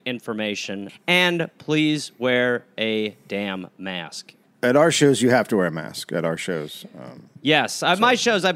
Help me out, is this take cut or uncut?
uncut